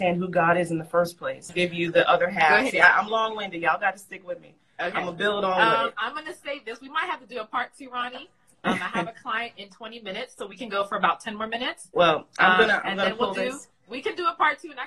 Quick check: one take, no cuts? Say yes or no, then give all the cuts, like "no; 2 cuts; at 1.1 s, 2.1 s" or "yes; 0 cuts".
no; 1 cut; at 1.5 s